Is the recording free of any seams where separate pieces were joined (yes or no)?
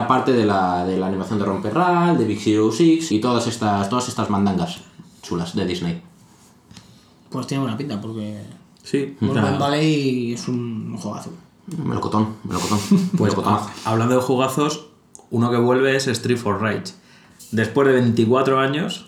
no